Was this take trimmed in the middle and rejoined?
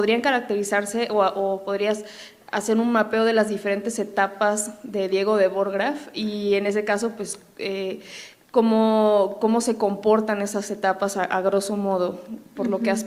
no; 0 cuts

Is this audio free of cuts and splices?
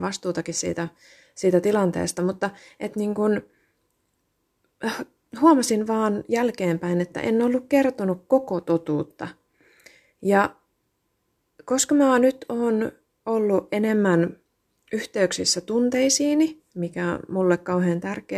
yes; 0 cuts

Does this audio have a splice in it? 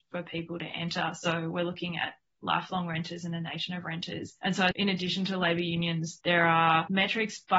no; 0 cuts

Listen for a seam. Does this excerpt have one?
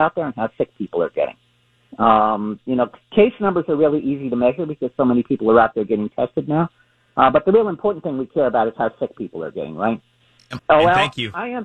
yes; 1 cut; at 10.6 s

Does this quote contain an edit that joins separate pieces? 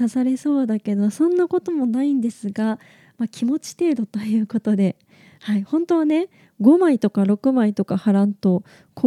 no; 0 cuts

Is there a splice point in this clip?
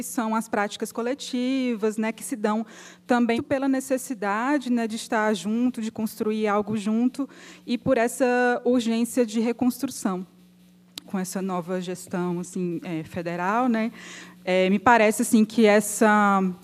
yes; 2 cuts; at 3.4 s, 11.0 s

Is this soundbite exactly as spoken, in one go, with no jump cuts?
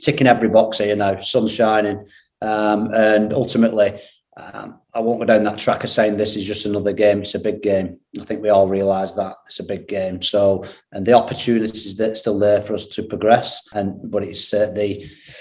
yes; 0 cuts

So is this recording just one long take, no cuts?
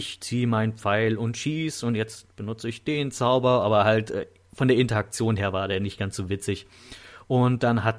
yes; 0 cuts

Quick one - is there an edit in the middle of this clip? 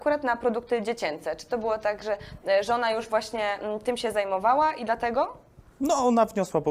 no; 0 cuts

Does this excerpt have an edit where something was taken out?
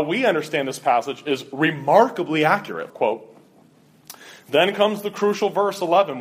yes; 1 cut; at 2.9 s

